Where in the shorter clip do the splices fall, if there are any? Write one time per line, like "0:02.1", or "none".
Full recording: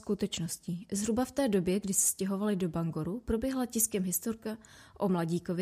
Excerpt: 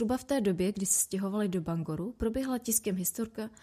none